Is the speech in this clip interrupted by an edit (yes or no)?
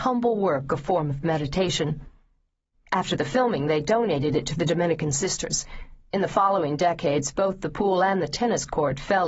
yes